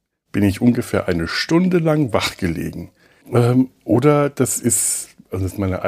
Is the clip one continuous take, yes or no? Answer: no